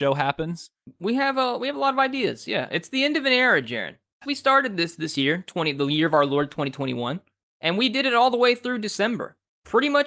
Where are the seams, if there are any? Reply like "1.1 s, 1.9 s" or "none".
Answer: 4.2 s